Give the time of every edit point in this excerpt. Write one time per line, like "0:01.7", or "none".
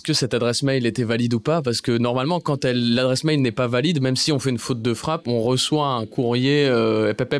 none